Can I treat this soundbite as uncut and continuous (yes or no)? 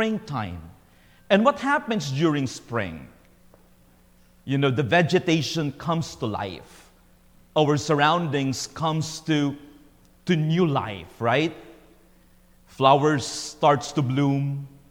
yes